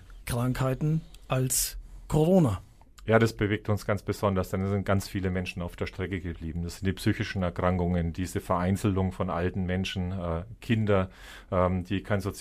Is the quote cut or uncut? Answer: uncut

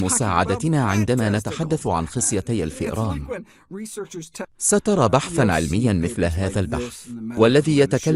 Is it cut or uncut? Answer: cut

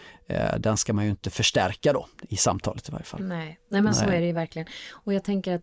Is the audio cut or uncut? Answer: uncut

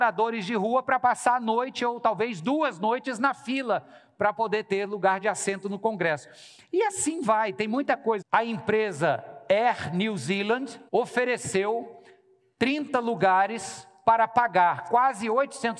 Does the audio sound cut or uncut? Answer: cut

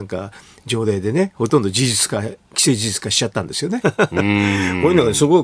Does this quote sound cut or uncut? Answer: cut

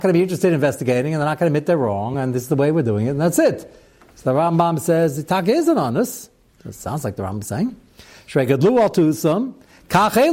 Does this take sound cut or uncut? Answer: uncut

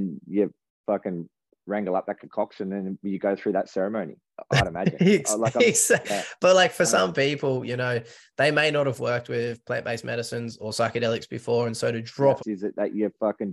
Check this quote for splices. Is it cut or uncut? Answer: cut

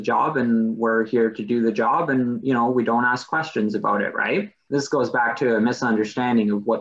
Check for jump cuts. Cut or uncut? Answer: cut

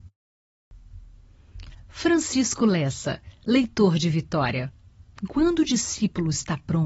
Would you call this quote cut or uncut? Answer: uncut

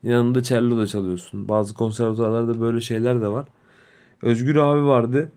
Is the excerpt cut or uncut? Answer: uncut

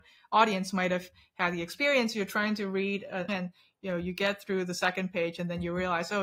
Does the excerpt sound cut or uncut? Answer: cut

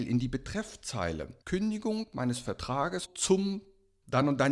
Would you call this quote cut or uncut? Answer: cut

